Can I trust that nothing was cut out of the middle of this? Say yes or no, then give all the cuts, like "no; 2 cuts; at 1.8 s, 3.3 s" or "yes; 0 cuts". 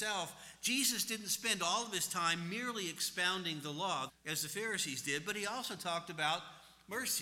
no; 1 cut; at 4.1 s